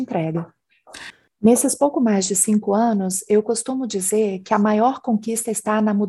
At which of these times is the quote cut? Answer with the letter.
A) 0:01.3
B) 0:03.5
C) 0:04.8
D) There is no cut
A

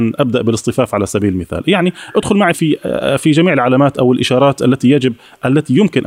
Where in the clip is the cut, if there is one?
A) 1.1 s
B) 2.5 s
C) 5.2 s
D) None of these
B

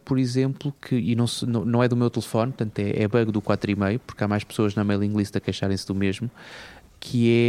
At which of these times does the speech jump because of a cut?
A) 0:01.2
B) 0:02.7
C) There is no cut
C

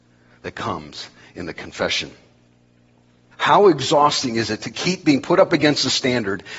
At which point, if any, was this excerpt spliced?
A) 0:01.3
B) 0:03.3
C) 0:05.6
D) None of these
B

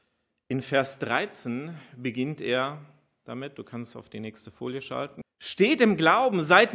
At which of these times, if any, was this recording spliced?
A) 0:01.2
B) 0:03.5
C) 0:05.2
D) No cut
C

